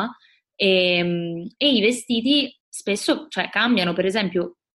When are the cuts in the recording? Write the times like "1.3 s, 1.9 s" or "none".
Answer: 2.6 s